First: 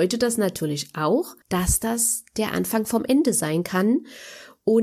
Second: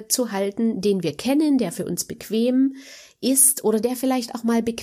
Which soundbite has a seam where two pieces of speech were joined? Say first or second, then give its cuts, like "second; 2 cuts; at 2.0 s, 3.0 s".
first; 1 cut; at 1.4 s